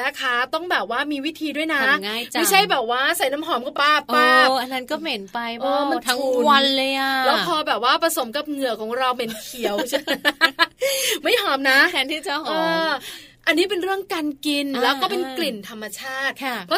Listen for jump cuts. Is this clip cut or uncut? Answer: cut